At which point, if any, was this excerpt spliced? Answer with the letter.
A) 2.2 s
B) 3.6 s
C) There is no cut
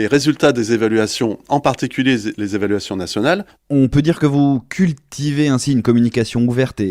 B